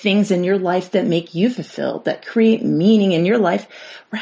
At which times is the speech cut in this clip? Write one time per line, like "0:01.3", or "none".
none